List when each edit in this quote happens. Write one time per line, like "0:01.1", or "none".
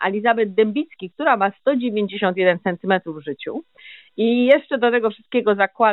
none